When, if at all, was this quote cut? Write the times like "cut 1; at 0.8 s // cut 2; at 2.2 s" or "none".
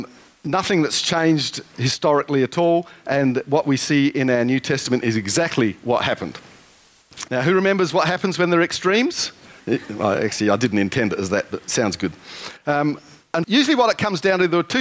cut 1; at 7.3 s // cut 2; at 9.6 s // cut 3; at 13.4 s

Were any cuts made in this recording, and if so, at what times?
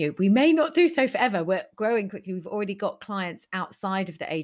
cut 1; at 2.1 s

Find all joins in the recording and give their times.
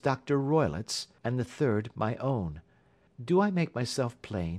cut 1; at 1.2 s // cut 2; at 3.1 s

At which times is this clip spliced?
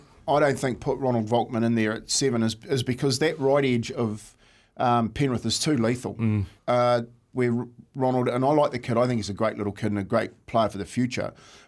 cut 1; at 6.6 s

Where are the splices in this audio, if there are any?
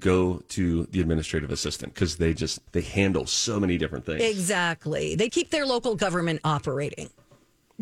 cut 1; at 2.7 s // cut 2; at 5.3 s

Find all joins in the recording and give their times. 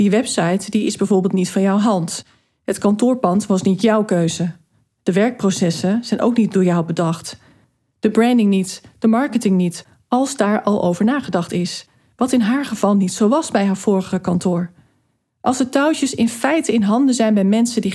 none

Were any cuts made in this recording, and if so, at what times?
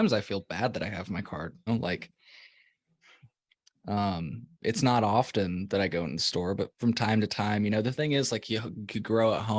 cut 1; at 1.7 s

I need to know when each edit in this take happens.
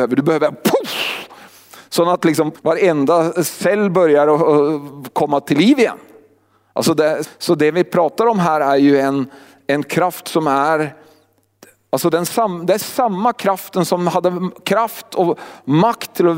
cut 1; at 2.5 s // cut 2; at 7.2 s

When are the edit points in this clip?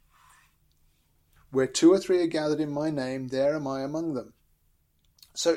cut 1; at 1.4 s

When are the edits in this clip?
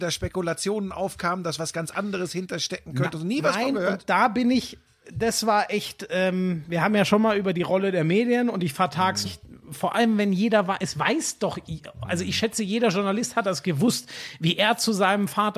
cut 1; at 9.2 s

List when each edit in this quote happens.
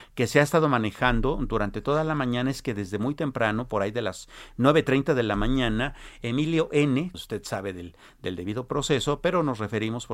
cut 1; at 7.1 s

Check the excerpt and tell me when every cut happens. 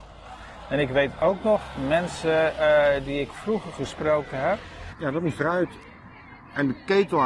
cut 1; at 4.9 s

